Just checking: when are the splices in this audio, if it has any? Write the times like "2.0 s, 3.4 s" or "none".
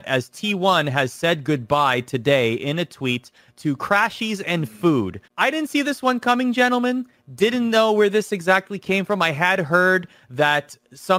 5.3 s